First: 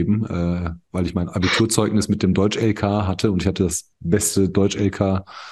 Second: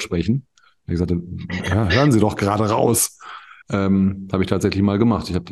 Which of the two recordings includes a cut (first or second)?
second